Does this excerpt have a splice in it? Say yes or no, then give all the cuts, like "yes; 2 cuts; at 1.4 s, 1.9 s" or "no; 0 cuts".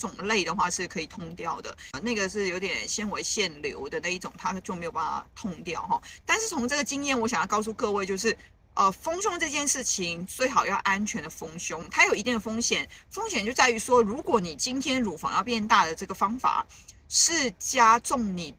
yes; 1 cut; at 6.2 s